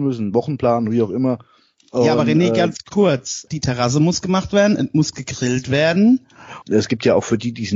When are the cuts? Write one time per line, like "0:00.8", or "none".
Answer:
0:03.5
0:06.6